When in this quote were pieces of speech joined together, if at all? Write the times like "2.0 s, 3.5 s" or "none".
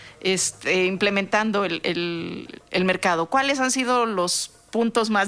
none